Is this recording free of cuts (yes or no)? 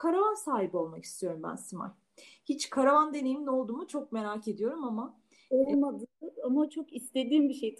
no